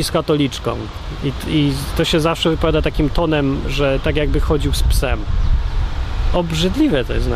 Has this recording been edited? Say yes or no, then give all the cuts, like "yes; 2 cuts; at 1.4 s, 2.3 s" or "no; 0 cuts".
no; 0 cuts